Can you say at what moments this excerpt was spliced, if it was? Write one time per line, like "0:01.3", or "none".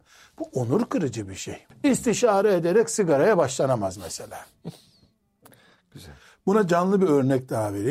0:01.7